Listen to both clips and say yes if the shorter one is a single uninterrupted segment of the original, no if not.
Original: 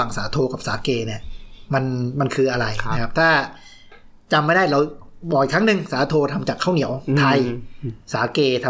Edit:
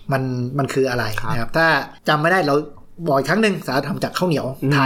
no